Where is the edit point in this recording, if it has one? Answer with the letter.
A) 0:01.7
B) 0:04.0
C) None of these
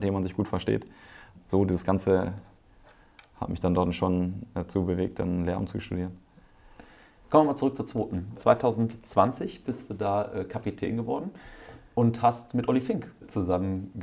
C